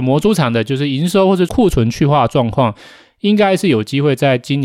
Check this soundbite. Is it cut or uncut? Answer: uncut